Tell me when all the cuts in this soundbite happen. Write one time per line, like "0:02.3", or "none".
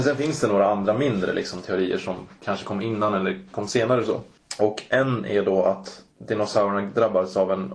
none